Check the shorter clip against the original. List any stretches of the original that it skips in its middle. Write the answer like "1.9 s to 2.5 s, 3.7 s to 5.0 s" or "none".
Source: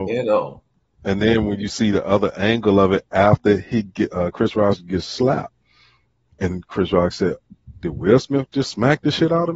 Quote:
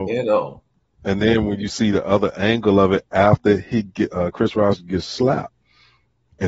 none